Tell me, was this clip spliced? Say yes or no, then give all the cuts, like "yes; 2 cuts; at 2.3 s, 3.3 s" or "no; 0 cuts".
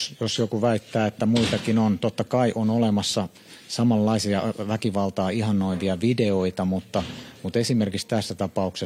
no; 0 cuts